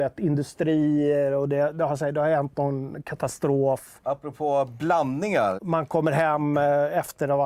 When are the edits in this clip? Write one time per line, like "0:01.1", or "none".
0:04.0
0:05.6